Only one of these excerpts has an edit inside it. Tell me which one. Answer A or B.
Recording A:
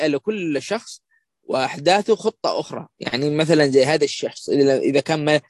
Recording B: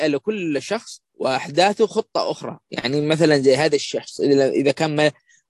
B